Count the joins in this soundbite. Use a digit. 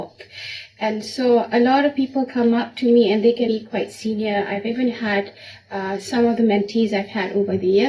1